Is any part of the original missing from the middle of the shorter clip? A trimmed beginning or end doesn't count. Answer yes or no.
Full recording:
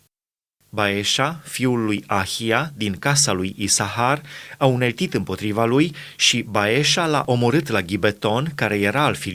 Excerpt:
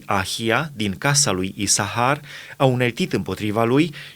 no